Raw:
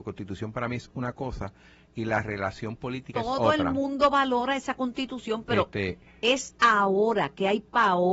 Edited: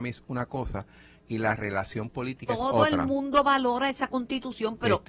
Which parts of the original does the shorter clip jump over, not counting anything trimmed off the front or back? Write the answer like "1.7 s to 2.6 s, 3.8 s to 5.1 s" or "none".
none